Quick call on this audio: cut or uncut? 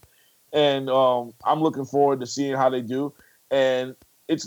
uncut